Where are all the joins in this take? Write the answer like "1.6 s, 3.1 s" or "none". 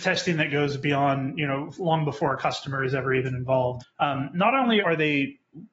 3.8 s, 4.8 s